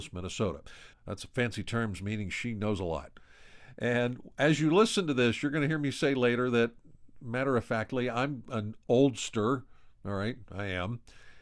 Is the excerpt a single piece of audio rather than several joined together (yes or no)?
no